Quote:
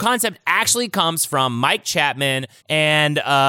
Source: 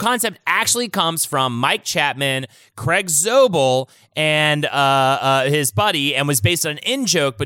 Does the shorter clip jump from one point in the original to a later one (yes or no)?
yes